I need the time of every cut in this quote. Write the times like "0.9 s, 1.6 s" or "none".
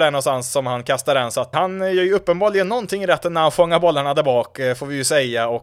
1.5 s